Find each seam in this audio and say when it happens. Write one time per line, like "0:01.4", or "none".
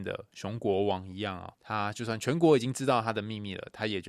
0:01.5